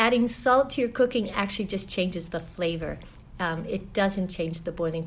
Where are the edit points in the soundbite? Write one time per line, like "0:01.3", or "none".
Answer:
none